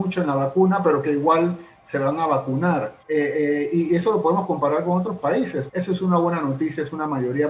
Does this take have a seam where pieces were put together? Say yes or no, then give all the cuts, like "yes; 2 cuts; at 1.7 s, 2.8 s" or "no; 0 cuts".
yes; 2 cuts; at 3.0 s, 5.7 s